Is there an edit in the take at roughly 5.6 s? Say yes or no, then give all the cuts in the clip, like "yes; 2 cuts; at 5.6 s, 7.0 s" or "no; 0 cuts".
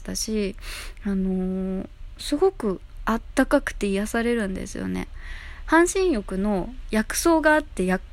yes; 1 cut; at 5.6 s